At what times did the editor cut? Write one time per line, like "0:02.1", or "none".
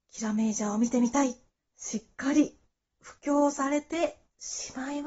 0:01.6